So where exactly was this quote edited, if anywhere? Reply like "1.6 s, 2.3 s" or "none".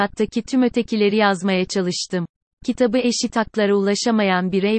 2.5 s